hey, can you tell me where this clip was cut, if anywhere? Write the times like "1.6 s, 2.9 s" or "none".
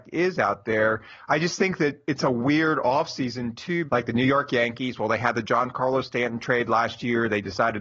3.9 s